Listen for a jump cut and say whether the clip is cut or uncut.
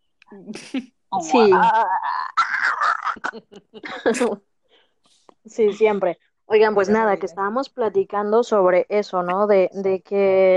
uncut